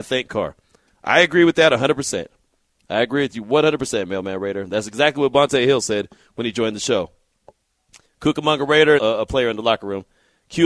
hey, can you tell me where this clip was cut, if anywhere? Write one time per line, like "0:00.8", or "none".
0:09.0